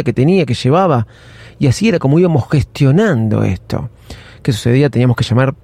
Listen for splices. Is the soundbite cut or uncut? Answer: uncut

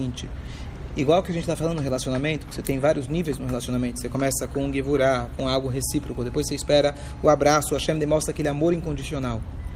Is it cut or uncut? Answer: uncut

